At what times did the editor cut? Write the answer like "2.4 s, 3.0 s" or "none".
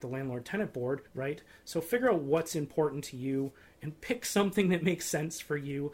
1.1 s